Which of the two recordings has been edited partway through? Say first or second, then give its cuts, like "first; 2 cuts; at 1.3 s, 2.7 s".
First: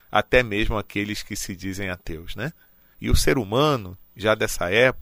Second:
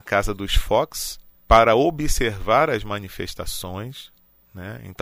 first; 1 cut; at 2.9 s